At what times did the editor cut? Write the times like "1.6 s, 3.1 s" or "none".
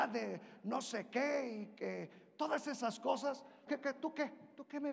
3.7 s